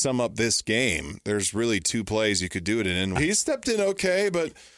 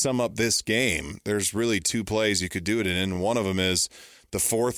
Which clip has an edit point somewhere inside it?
first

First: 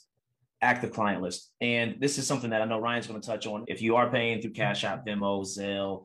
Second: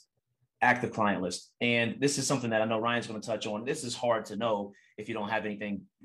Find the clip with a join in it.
first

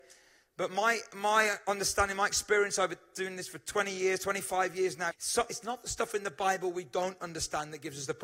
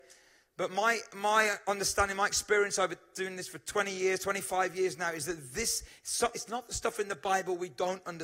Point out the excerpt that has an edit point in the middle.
first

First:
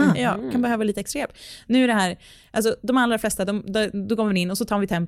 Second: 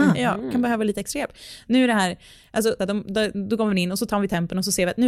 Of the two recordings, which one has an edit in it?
second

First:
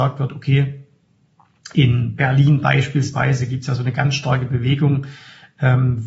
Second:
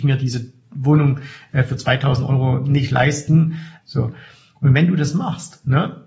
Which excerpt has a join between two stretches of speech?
second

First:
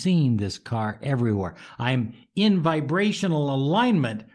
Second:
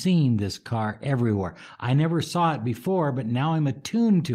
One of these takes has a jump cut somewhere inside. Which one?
first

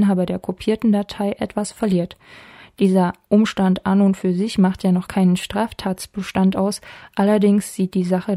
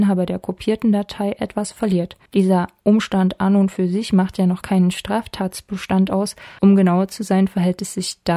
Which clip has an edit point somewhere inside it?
second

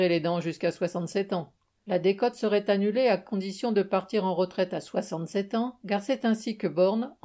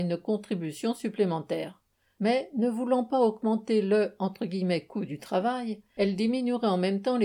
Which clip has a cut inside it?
first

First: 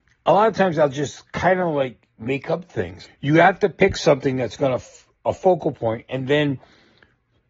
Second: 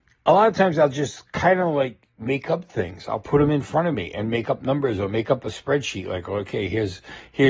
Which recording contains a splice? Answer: first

